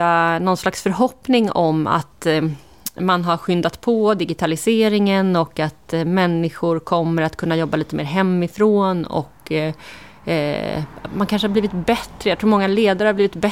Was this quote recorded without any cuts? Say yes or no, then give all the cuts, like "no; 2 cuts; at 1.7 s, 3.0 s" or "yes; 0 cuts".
yes; 0 cuts